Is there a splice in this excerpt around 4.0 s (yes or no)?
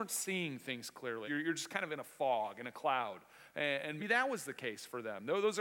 yes